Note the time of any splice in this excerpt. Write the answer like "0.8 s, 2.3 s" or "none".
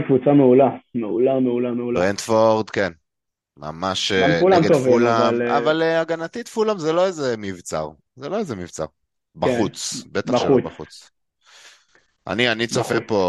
none